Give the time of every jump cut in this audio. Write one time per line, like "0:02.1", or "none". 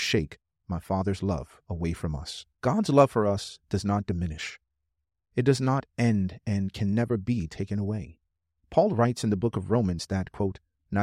0:02.5